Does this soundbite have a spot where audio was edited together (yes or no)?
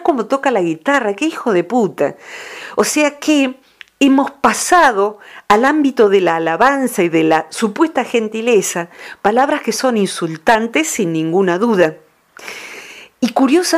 no